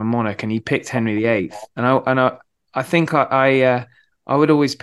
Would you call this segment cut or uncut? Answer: cut